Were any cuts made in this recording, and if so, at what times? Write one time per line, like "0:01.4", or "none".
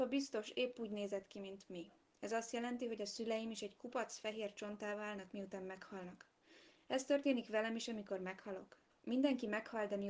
none